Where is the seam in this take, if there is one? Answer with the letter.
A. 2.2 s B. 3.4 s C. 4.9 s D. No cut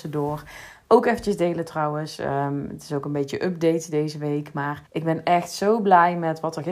C